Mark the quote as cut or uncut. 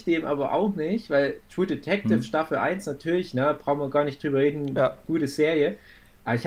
uncut